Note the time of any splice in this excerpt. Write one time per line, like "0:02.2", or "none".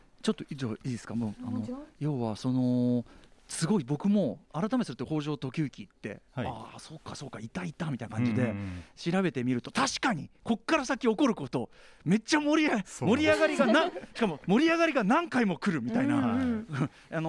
none